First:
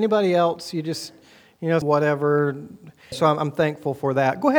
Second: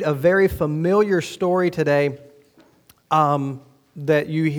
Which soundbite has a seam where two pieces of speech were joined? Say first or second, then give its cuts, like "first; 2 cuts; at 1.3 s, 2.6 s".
first; 2 cuts; at 1.8 s, 3.1 s